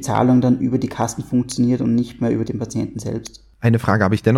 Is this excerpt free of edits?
no; 1 cut; at 2.4 s

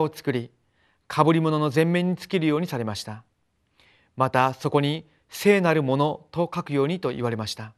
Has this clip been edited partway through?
no; 0 cuts

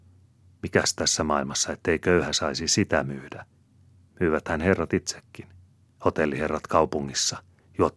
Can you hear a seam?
no; 0 cuts

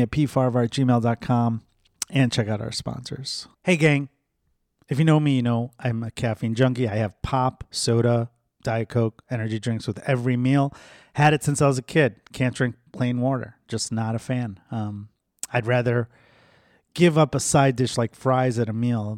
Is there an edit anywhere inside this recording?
yes; 1 cut; at 3.5 s

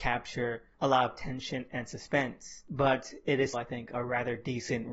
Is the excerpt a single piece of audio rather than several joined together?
no; 1 cut; at 3.5 s

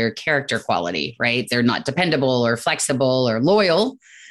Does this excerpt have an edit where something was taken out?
no; 0 cuts

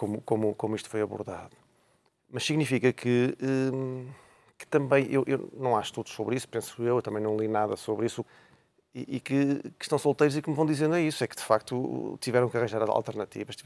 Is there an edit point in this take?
yes; 1 cut; at 8.2 s

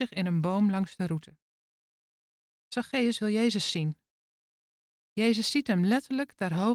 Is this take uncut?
no; 2 cuts; at 2.5 s, 4.9 s

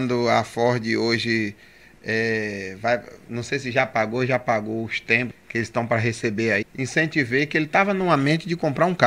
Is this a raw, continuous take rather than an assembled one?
no; 2 cuts; at 5.3 s, 6.6 s

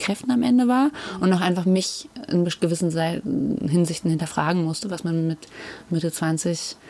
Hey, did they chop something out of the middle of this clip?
no; 0 cuts

